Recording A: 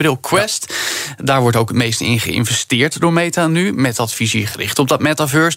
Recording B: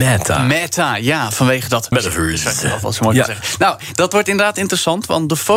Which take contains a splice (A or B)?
B